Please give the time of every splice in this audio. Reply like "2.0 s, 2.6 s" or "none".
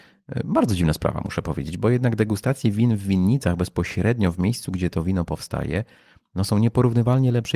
none